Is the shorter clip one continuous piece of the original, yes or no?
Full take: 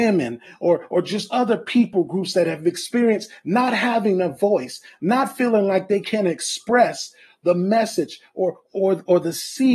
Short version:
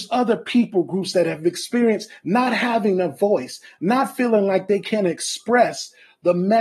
yes